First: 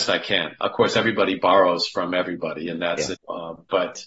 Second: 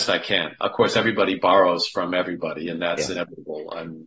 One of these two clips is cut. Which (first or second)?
first